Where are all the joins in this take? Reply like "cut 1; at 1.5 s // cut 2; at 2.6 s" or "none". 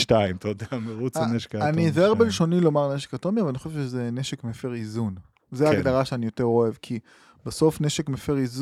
none